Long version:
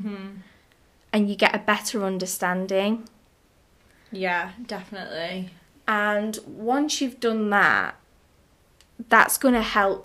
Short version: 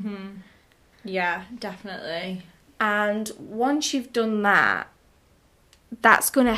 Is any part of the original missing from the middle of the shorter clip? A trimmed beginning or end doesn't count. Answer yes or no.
yes